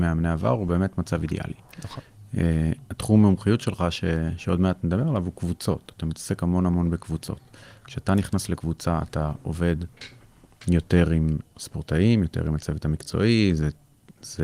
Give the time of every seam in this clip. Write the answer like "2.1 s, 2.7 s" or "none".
none